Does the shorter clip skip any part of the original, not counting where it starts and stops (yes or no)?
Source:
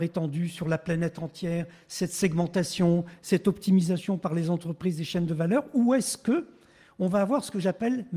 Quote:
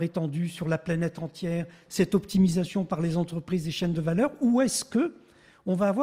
yes